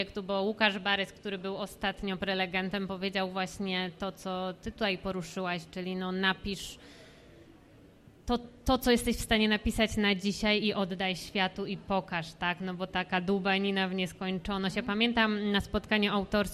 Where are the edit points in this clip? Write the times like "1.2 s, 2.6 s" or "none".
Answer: none